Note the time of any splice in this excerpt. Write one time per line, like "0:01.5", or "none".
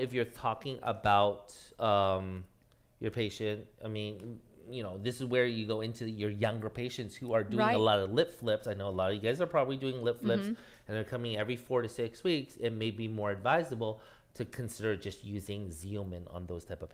none